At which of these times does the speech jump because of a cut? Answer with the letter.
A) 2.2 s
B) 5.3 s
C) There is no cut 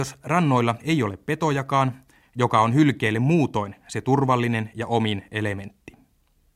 A